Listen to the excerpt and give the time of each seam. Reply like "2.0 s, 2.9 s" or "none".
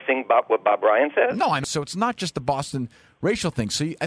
1.6 s